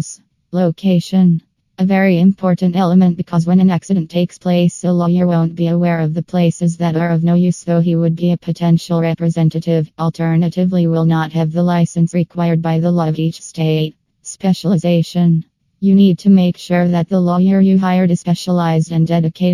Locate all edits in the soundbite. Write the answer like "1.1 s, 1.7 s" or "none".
none